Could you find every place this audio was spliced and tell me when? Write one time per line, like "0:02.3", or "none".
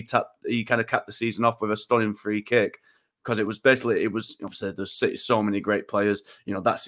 none